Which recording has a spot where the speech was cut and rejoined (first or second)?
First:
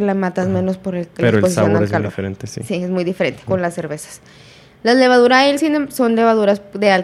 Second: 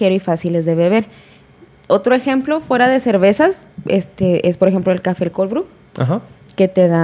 first